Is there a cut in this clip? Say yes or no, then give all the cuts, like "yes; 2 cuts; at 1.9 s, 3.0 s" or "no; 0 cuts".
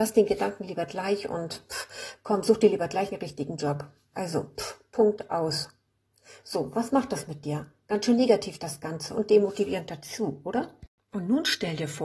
no; 0 cuts